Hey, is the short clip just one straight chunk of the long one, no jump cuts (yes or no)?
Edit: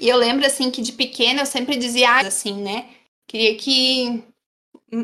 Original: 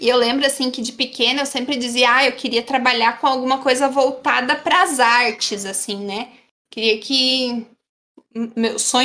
no